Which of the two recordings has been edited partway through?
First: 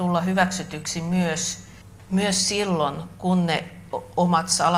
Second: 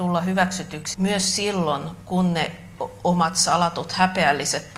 second; 1 cut; at 0.9 s

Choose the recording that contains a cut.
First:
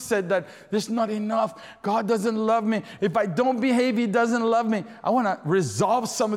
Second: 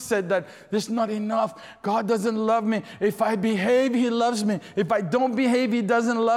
first; 1 cut; at 3.0 s

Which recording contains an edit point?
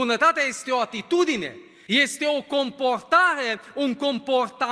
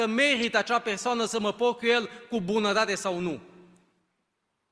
first; 1 cut; at 1.9 s

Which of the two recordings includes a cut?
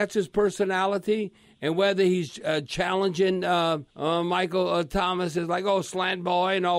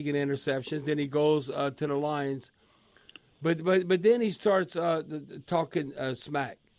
first; 1 cut; at 3.9 s

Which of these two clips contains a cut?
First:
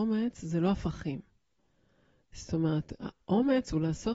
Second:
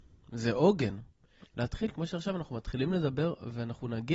second; 1 cut; at 1.5 s

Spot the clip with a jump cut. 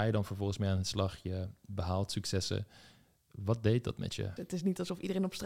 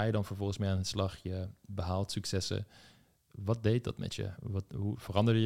first; 1 cut; at 4.4 s

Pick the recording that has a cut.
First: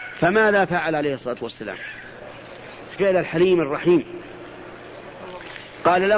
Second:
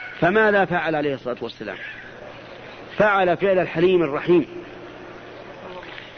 first; 1 cut; at 3.0 s

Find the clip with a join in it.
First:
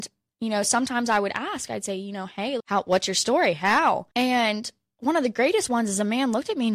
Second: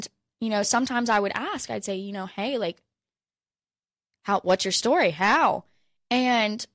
first; 2 cuts; at 2.6 s, 4.1 s

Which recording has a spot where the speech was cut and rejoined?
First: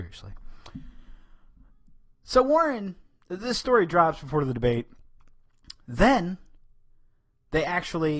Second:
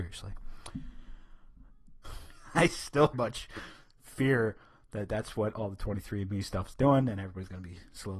second; 2 cuts; at 2.0 s, 3.1 s

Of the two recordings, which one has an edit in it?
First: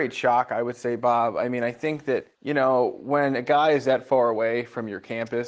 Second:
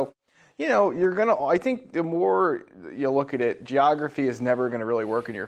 first; 1 cut; at 2.3 s

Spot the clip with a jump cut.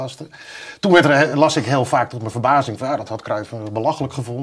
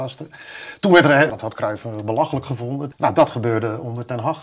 second; 2 cuts; at 1.3 s, 2.9 s

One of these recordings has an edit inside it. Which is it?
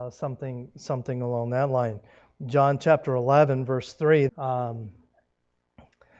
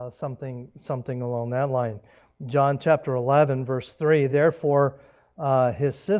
first; 1 cut; at 4.3 s

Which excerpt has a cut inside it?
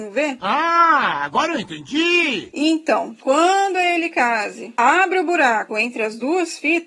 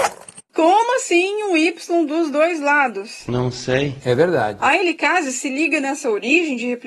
second; 1 cut; at 4.0 s

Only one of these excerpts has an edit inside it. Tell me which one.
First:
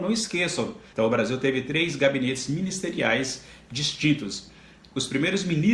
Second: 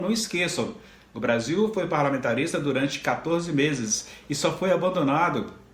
first; 1 cut; at 0.9 s

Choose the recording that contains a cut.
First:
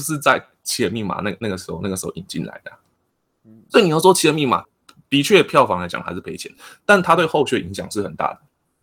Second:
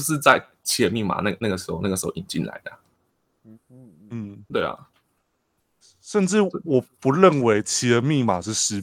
second; 1 cut; at 3.5 s

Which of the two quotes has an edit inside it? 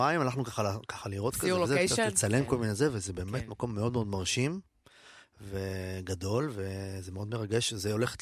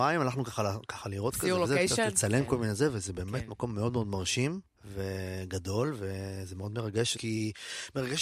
second; 2 cuts; at 4.8 s, 7.2 s

